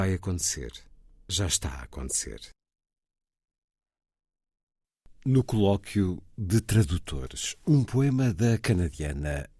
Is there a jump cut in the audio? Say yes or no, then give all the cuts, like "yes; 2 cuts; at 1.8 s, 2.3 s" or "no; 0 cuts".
no; 0 cuts